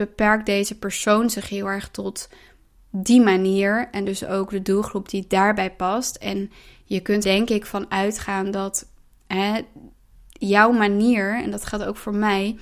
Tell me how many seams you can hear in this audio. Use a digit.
1